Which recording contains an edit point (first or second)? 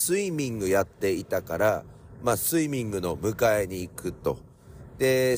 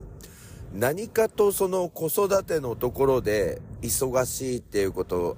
second